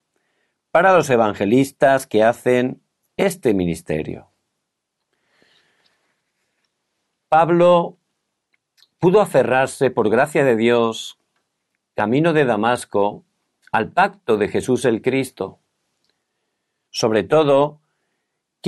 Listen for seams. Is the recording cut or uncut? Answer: cut